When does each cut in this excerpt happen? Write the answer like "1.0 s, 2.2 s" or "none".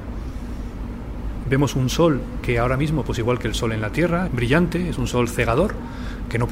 1.4 s, 4.3 s